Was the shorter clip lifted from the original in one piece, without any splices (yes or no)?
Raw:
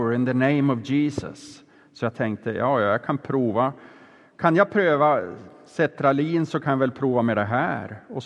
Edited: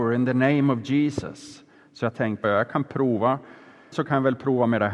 no